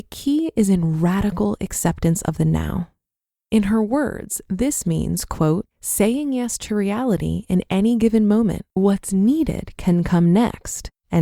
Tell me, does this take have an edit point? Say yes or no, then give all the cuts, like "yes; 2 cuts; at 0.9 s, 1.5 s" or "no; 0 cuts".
yes; 2 cuts; at 5.7 s, 8.8 s